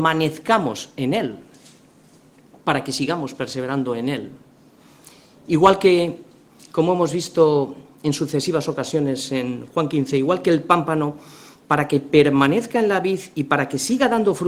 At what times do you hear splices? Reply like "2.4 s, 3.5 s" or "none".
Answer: none